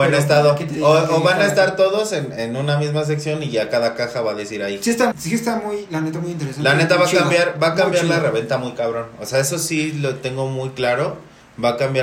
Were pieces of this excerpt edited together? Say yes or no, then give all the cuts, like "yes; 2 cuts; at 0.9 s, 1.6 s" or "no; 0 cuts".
yes; 1 cut; at 5.1 s